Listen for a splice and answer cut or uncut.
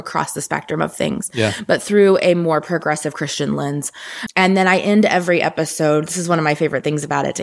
uncut